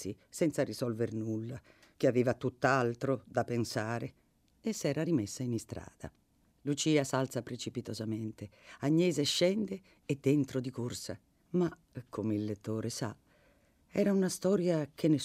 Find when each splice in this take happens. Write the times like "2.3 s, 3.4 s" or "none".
6.5 s, 11.4 s